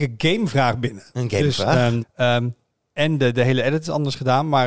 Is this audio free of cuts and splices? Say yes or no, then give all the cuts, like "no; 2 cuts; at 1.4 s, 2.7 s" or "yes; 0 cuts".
no; 1 cut; at 2.0 s